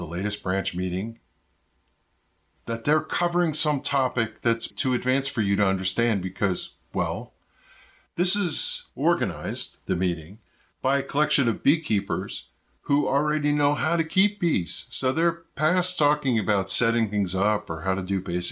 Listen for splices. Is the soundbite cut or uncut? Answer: cut